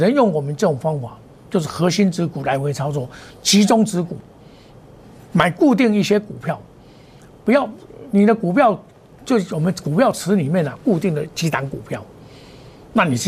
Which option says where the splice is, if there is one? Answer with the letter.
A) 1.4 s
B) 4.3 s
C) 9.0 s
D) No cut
D